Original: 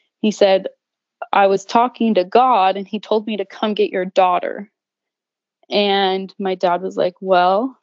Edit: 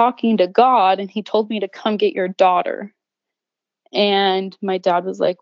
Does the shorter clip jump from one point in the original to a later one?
no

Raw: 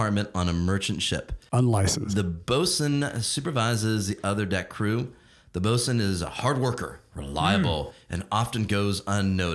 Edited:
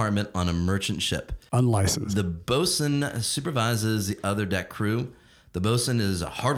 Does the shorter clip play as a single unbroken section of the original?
yes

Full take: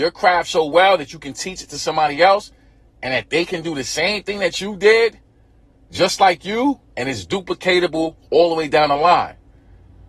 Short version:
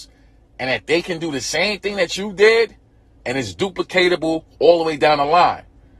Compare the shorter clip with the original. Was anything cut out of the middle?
yes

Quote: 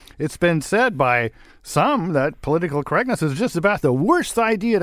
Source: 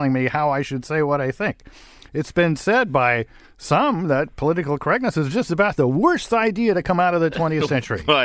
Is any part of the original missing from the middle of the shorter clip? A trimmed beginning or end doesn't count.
no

